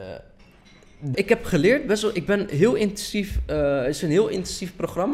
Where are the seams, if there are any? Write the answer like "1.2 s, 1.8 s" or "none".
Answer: 1.1 s